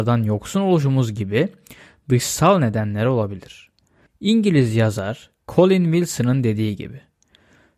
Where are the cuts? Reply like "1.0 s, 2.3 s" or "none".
4.1 s